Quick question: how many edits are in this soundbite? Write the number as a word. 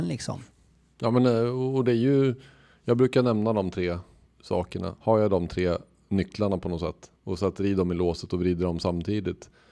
two